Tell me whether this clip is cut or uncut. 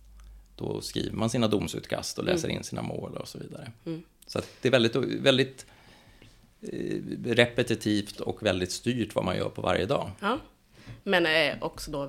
uncut